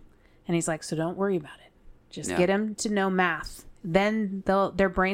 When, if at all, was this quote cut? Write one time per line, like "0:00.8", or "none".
none

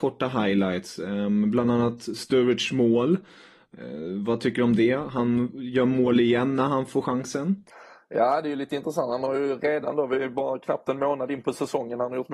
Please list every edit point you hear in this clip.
none

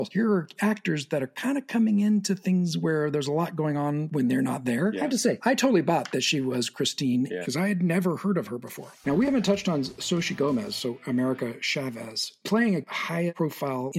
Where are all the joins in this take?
0:07.4
0:09.0

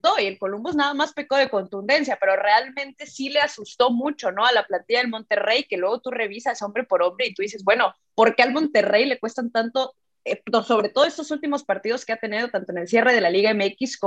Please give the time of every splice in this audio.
none

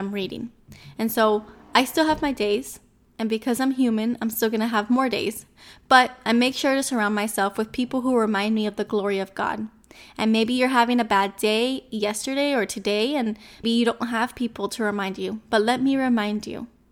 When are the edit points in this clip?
0:13.6

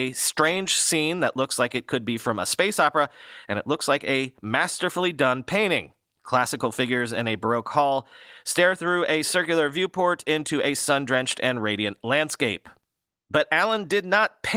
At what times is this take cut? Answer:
none

